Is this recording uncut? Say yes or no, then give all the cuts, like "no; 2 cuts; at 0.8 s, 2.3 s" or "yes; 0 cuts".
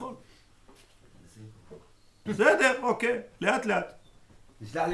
no; 1 cut; at 2.3 s